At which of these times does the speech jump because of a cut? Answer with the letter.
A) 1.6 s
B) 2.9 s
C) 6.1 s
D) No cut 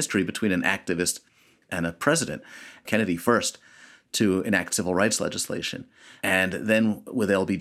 B